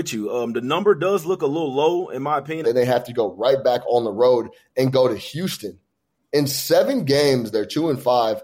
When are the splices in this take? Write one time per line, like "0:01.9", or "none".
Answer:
0:02.6
0:07.5